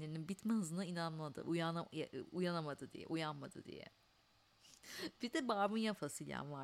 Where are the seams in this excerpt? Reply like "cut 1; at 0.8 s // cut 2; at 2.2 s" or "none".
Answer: none